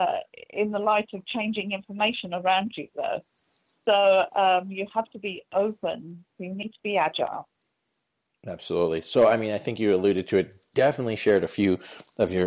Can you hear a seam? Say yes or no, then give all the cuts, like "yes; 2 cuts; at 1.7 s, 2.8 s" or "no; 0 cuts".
yes; 1 cut; at 6.3 s